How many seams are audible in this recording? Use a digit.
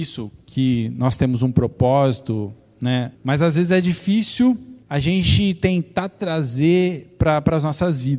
2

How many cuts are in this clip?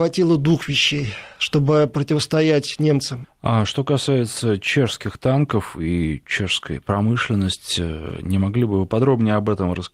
1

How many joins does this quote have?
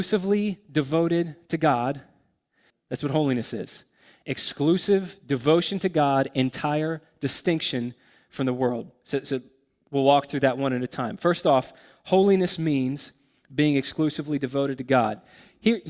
1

